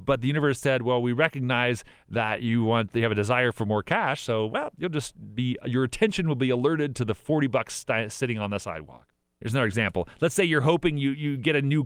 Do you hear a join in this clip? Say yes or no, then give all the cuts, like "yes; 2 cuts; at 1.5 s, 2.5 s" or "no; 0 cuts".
no; 0 cuts